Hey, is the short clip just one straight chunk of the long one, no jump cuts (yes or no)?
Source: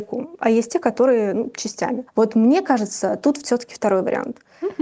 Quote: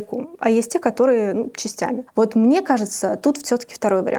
yes